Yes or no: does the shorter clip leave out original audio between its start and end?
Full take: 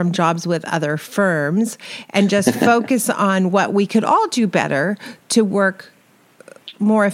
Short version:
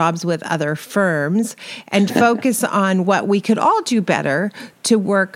yes